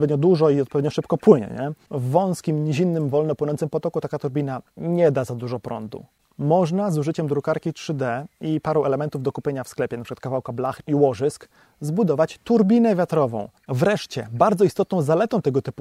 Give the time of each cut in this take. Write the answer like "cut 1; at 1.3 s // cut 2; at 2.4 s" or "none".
cut 1; at 10.8 s // cut 2; at 13.6 s